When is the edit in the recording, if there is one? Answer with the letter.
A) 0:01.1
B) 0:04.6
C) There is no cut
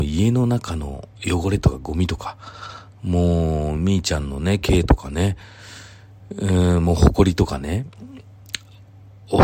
A